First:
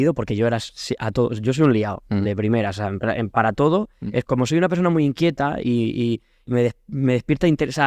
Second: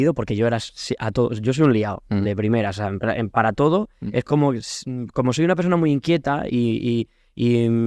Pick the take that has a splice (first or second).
first